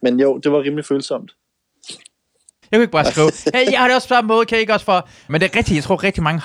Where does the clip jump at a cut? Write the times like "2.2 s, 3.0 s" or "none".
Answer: 2.6 s, 5.3 s